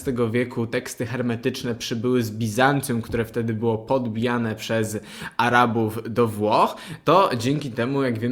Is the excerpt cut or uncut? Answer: uncut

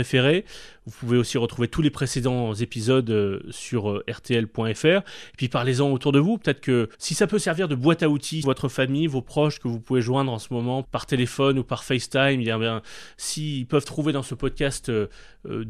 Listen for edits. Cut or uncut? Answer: cut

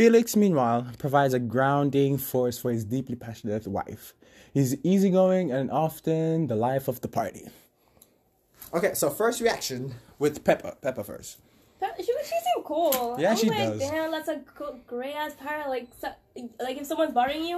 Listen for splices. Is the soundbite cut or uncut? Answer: uncut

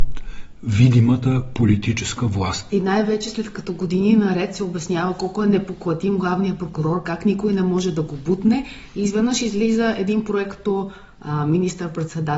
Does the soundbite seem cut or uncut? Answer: cut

